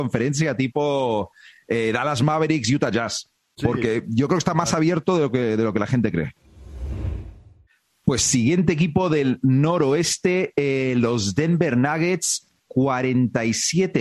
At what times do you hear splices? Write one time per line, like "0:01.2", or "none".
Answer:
none